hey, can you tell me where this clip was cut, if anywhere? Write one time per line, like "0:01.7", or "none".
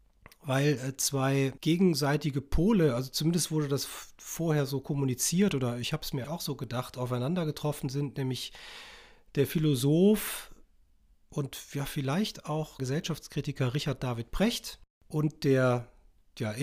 0:06.2
0:12.8